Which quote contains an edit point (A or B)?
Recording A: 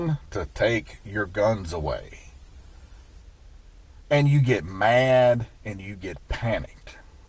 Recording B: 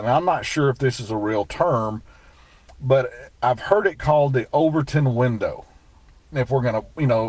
B